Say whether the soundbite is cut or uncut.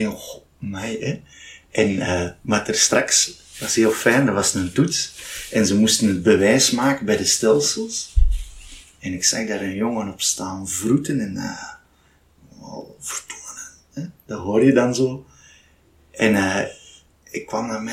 uncut